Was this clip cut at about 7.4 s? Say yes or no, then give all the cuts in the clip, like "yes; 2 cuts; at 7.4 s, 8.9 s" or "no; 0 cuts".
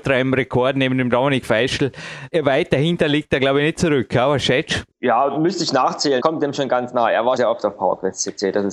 yes; 3 cuts; at 4.9 s, 6.2 s, 7.4 s